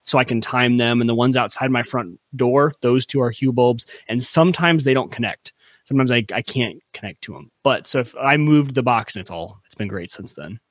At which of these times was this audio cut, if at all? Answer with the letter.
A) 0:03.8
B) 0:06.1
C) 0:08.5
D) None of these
D